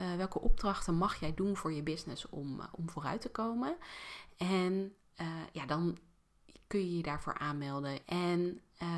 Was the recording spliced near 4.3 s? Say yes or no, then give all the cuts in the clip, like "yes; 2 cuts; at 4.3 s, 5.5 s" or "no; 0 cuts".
yes; 2 cuts; at 4.3 s, 8.0 s